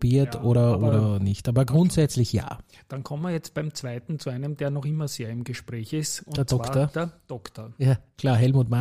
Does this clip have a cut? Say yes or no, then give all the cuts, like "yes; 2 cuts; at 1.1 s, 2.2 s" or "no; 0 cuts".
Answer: no; 0 cuts